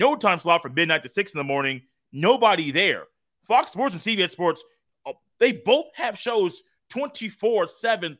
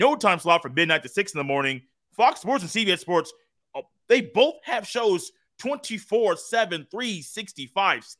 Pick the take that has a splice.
second; 1 cut; at 1.9 s

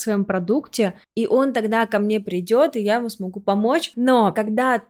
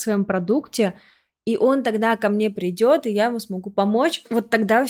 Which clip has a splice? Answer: first; 2 cuts; at 1.0 s, 3.9 s

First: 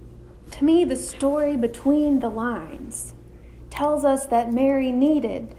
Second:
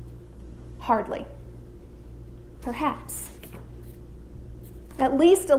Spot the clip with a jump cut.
second; 1 cut; at 2.6 s

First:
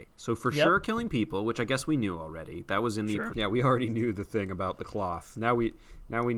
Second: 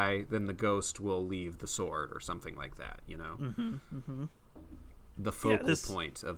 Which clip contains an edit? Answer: first; 1 cut; at 3.3 s

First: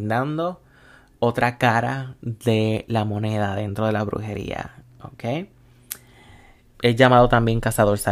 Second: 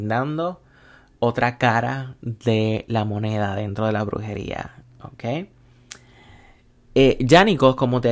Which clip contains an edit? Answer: first; 1 cut; at 6.7 s

